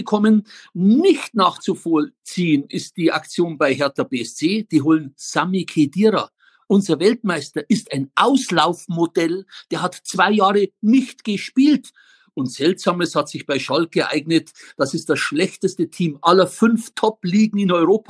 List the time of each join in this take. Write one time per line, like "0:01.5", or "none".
none